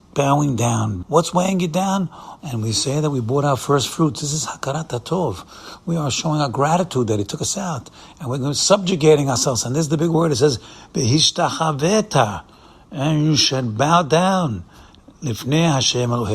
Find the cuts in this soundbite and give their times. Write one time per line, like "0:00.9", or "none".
0:01.0
0:02.4